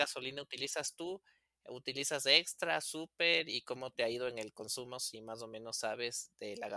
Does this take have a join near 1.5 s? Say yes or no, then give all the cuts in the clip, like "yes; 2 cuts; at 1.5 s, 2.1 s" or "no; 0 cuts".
no; 0 cuts